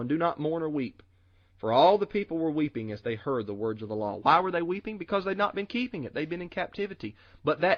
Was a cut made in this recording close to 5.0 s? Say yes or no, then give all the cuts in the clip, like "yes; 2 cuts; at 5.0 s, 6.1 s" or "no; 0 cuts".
no; 0 cuts